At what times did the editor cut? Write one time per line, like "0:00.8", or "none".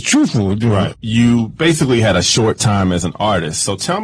0:00.9